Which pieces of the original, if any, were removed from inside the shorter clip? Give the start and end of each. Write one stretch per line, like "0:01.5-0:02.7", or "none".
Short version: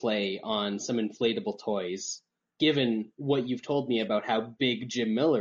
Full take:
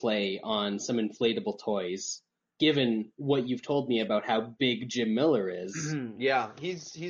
none